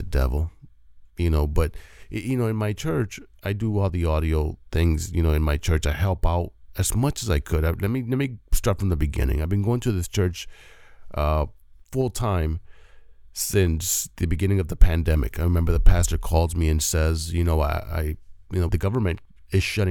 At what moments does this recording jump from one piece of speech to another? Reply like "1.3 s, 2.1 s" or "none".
18.7 s